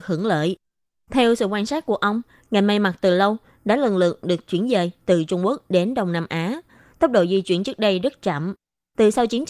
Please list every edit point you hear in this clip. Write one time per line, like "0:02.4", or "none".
none